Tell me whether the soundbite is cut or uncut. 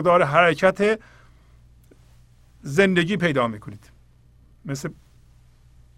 uncut